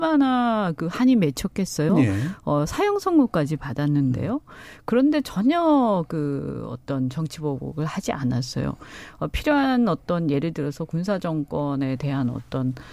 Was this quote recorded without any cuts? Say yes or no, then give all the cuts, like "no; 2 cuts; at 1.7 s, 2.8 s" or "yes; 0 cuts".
yes; 0 cuts